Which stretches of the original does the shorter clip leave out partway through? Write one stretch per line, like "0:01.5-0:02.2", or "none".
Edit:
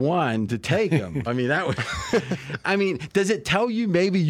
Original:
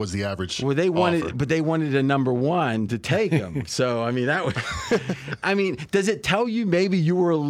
0:03.7-0:04.0